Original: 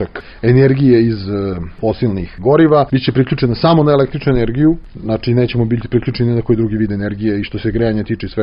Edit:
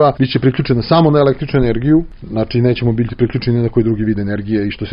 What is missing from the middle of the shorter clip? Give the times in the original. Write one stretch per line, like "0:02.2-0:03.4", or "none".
none